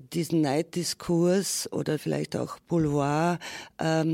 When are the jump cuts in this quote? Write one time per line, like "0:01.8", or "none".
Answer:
0:02.0

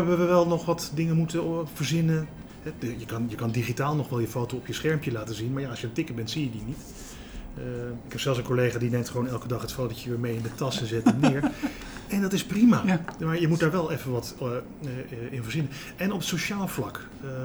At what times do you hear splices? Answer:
none

